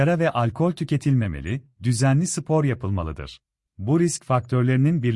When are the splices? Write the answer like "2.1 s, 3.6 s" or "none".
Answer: 3.7 s